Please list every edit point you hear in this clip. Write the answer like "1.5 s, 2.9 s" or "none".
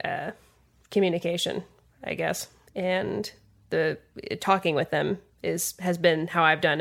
2.7 s